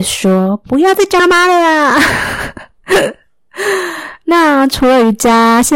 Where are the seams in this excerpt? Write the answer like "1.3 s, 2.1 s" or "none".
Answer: 1.2 s